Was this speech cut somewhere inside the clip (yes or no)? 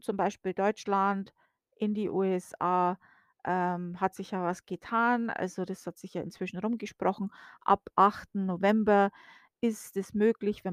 no